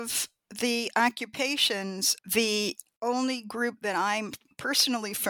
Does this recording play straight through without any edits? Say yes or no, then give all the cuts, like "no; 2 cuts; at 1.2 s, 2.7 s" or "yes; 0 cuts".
no; 1 cut; at 2.2 s